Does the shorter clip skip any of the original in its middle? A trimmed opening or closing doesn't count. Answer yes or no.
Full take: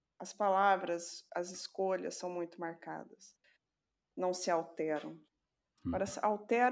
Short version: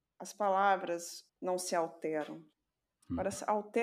yes